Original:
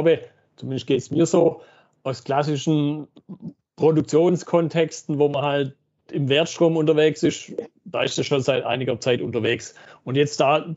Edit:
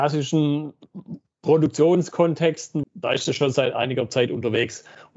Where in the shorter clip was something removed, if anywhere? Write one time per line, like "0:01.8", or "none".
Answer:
0:02.8